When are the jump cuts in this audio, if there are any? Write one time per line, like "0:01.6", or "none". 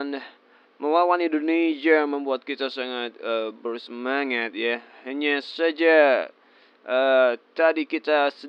none